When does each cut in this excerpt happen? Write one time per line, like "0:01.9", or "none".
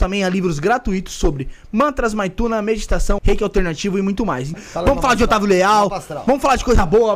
0:03.2
0:04.5